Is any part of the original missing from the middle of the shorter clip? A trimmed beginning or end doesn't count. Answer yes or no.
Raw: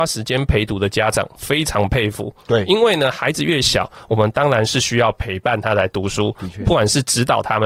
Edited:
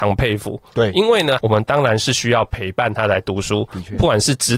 yes